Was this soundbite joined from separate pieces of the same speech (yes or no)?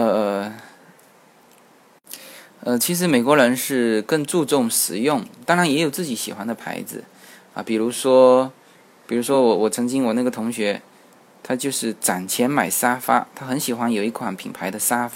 no